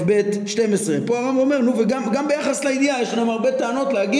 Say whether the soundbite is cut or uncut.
uncut